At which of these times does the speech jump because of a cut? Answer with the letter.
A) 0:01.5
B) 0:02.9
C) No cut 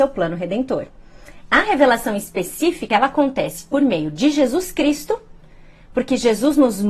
C